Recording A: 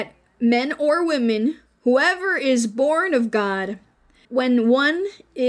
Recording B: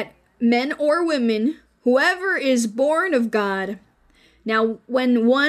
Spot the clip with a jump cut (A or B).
A